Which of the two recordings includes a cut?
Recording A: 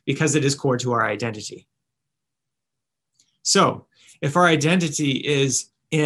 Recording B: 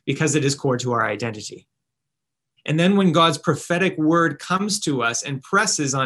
B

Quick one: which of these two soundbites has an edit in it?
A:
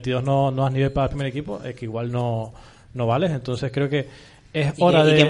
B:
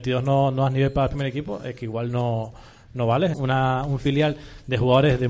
B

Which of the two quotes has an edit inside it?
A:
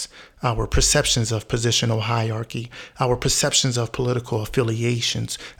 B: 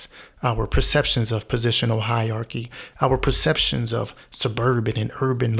B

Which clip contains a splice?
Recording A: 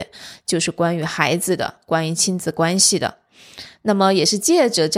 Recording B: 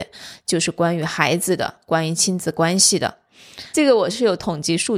B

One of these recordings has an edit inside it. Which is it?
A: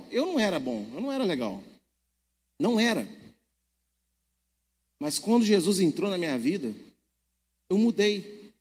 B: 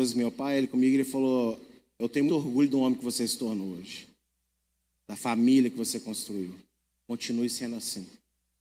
B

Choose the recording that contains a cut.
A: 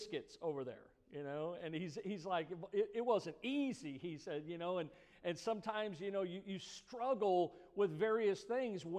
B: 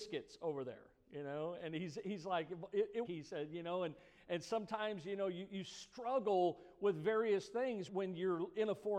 B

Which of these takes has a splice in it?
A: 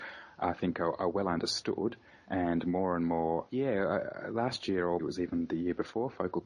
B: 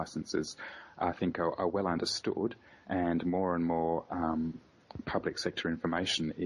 A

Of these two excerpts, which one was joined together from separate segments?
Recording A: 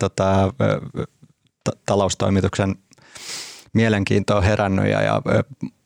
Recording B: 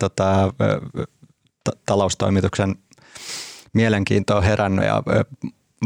B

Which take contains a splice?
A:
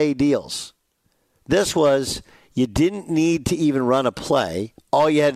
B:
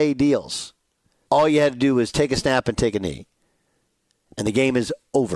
B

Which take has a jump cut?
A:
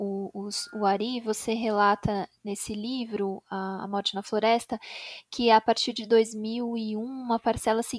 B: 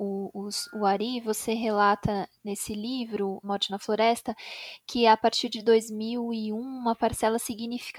B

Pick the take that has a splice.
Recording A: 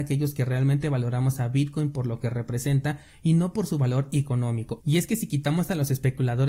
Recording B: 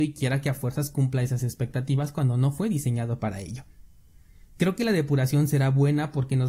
A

